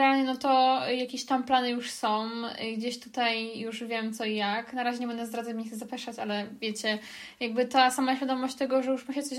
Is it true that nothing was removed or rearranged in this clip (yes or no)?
yes